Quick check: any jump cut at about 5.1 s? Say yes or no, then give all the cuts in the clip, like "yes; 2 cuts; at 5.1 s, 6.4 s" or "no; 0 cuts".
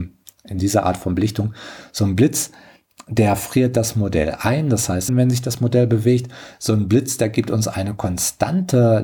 yes; 1 cut; at 5.1 s